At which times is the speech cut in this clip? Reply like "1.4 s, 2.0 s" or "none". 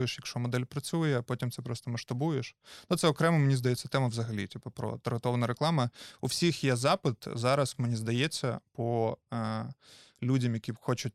none

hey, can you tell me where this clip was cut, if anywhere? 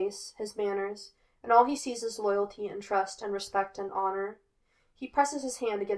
none

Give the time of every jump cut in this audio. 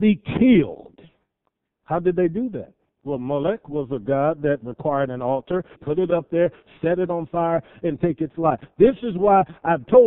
5.7 s

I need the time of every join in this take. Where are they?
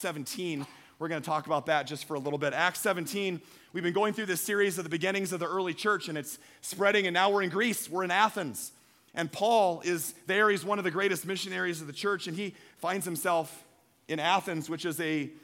none

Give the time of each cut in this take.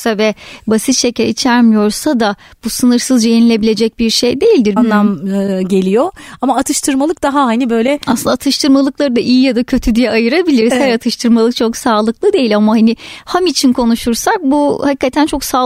4.8 s

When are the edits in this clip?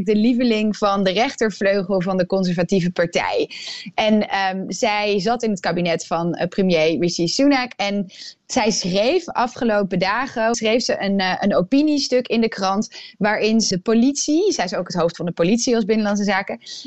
10.5 s, 13.7 s

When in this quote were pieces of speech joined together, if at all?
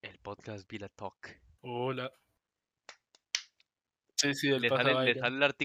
1.6 s, 4.0 s

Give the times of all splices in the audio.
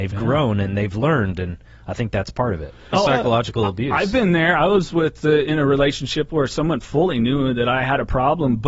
2.9 s

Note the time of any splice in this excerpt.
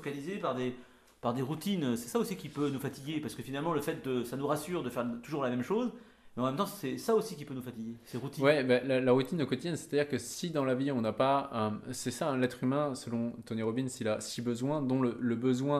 none

